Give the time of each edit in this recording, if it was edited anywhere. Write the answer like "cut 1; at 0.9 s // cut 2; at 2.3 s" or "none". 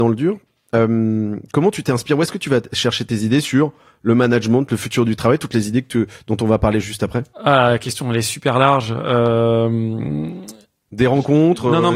cut 1; at 7.3 s